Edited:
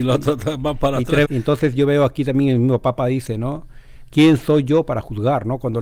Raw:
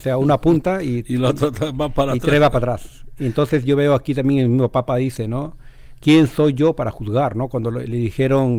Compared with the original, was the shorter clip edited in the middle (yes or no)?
yes